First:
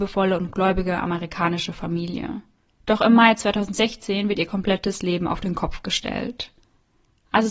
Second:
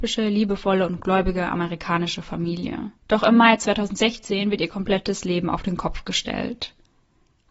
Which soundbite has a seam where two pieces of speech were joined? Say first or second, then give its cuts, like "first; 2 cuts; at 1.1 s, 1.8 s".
second; 1 cut; at 3.0 s